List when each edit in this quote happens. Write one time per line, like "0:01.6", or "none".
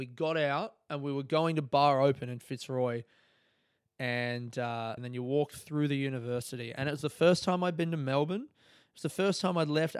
0:05.0